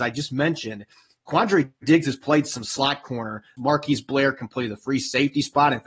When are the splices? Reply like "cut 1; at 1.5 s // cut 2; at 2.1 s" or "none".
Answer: cut 1; at 3.6 s